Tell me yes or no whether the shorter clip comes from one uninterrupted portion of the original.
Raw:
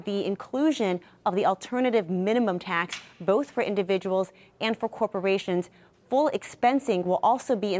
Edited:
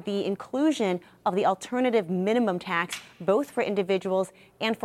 yes